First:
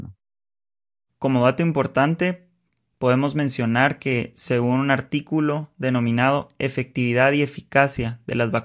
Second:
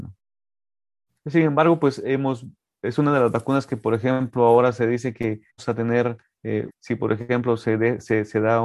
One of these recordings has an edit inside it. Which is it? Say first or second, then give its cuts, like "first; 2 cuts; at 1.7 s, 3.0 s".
second; 3 cuts; at 1.2 s, 5.5 s, 6.7 s